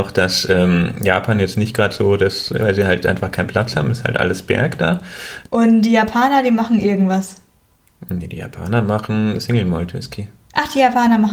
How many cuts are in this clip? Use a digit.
2